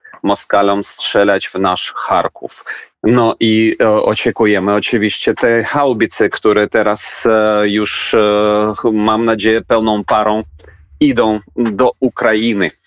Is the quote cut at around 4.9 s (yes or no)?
no